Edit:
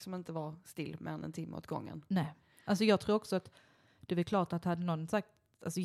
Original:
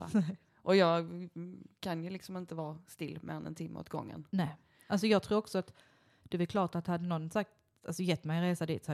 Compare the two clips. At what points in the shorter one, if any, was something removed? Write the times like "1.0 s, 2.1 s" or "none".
none